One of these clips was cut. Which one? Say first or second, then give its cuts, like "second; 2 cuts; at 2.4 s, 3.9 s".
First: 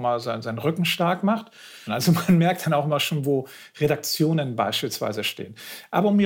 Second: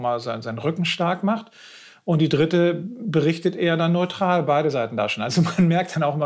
first; 1 cut; at 1.9 s